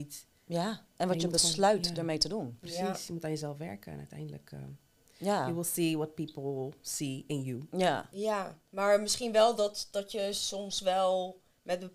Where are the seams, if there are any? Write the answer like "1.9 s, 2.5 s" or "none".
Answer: 8.1 s